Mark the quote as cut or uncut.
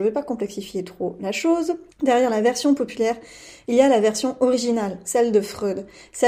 cut